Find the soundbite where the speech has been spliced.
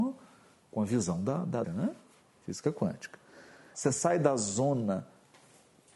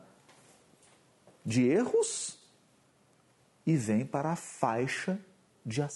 first; 2 cuts; at 1.6 s, 3.7 s

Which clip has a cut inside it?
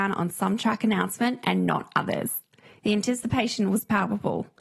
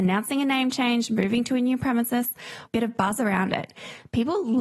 second; 1 cut; at 2.7 s

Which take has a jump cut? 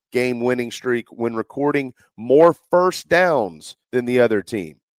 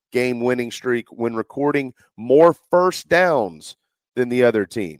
first; 1 cut; at 3.8 s

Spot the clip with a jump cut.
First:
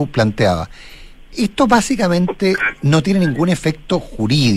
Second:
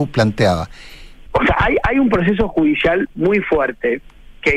second; 1 cut; at 1.3 s

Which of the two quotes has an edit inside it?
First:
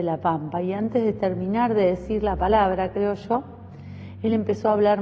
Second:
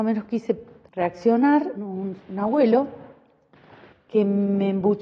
second; 2 cuts; at 1.7 s, 3.9 s

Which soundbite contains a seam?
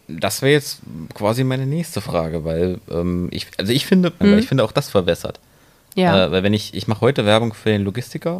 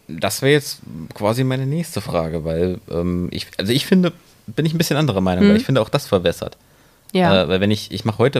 first; 1 cut; at 4.2 s

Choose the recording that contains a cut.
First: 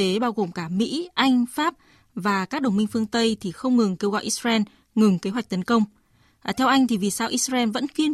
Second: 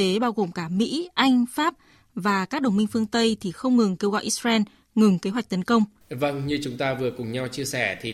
second; 1 cut; at 6.0 s

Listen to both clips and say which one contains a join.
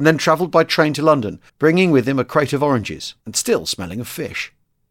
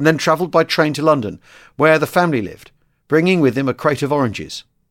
first; 2 cuts; at 1.5 s, 3.2 s

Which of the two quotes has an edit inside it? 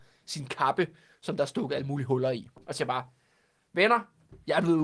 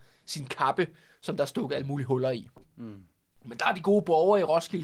first; 1 cut; at 2.6 s

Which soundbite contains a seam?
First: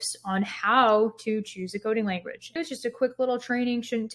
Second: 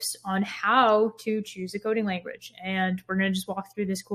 first; 1 cut; at 2.6 s

